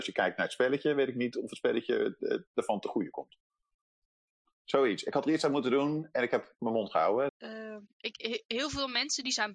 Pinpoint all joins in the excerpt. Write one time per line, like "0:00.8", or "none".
0:07.3